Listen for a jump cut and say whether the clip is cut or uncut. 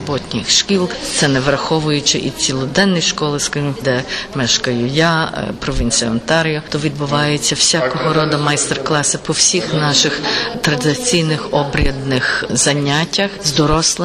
cut